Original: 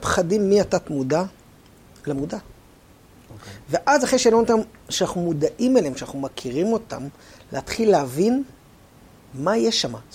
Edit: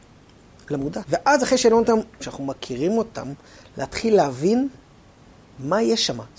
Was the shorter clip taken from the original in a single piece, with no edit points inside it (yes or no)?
no